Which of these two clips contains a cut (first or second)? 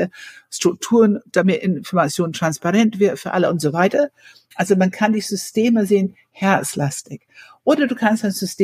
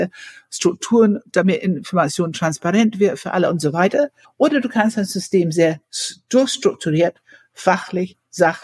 second